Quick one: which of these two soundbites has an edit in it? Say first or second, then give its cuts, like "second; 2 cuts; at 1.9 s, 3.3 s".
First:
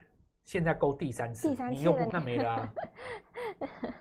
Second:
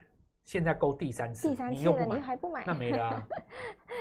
first; 1 cut; at 2.1 s